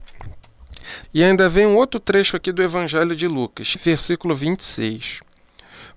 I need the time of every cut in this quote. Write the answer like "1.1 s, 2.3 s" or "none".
1.0 s, 3.8 s